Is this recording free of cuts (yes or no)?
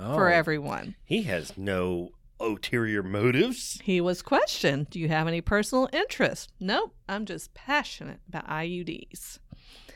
yes